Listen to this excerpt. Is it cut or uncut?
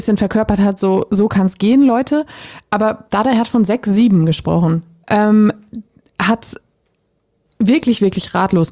cut